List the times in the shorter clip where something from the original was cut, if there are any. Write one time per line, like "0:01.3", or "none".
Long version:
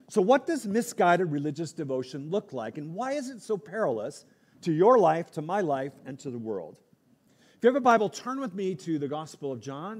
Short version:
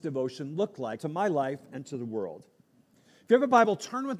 0:01.0